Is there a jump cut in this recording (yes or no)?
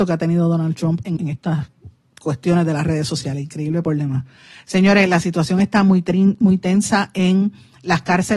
yes